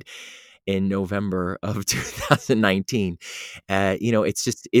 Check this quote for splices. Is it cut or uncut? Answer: uncut